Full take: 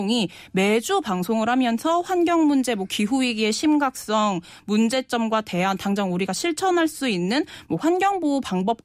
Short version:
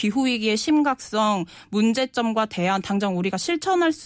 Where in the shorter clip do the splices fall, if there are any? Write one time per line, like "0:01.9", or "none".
none